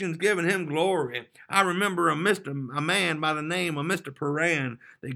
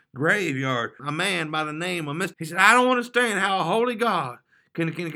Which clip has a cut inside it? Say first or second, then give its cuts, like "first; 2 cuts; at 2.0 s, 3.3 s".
second; 2 cuts; at 1.0 s, 2.3 s